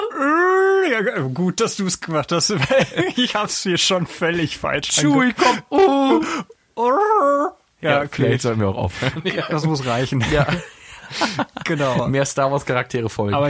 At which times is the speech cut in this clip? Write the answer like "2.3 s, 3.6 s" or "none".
none